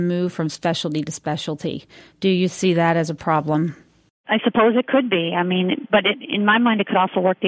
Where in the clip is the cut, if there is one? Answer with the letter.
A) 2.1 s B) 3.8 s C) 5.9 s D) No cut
D